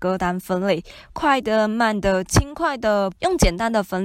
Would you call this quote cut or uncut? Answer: cut